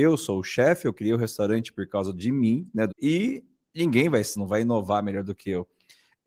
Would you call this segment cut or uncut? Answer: cut